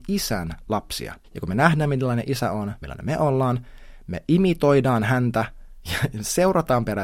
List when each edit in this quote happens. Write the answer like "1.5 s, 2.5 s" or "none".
1.2 s, 2.8 s